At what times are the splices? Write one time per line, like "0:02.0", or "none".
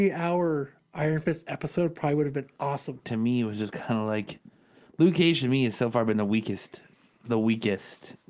0:03.0